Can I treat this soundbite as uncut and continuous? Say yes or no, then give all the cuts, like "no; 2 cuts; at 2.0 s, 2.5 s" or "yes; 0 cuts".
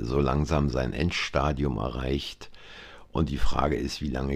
yes; 0 cuts